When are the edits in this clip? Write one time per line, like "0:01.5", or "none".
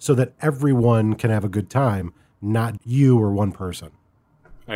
0:02.8